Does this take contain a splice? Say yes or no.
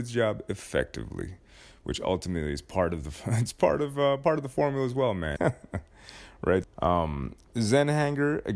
yes